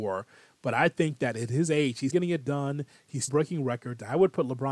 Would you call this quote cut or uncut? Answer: cut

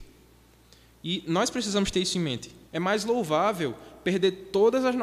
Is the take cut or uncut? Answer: cut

